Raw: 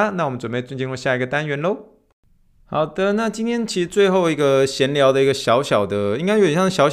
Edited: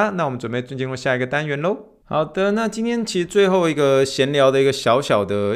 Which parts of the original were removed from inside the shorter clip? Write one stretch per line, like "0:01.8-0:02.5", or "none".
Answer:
0:02.0-0:02.6